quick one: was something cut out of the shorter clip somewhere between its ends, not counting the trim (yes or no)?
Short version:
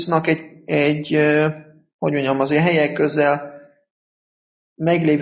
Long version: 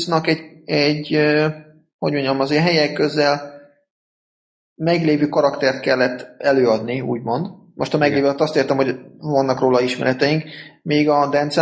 no